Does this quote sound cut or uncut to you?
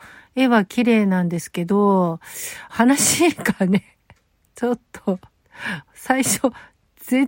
cut